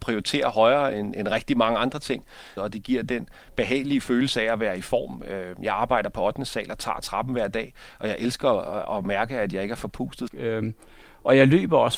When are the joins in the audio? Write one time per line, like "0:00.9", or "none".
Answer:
0:01.1
0:02.6
0:10.3